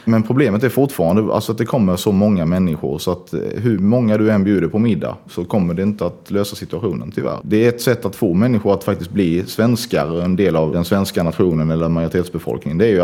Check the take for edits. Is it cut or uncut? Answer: cut